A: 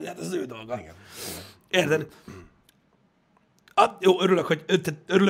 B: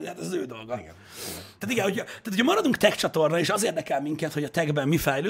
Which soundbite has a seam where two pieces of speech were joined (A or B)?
B